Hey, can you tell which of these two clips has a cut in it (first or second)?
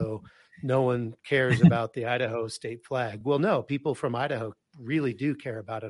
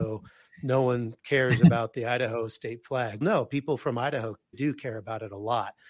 second